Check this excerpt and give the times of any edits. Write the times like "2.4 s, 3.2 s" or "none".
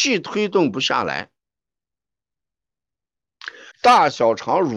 3.7 s